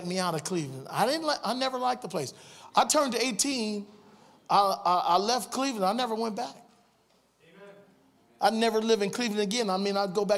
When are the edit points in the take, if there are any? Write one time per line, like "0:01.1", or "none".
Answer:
none